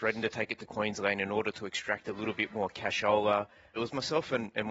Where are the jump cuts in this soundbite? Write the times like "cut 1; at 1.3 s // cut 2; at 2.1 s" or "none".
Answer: cut 1; at 3.8 s